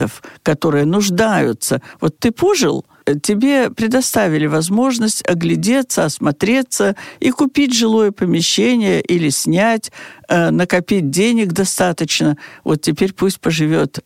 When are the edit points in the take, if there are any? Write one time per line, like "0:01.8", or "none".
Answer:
none